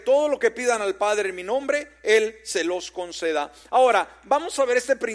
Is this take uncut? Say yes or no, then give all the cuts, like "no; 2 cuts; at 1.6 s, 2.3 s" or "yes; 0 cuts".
yes; 0 cuts